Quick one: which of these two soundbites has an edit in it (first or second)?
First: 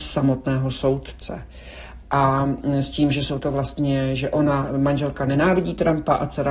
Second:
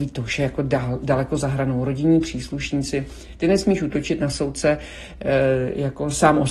first